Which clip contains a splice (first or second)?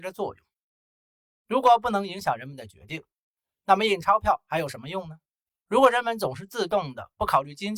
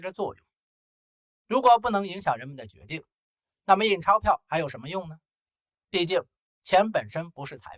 first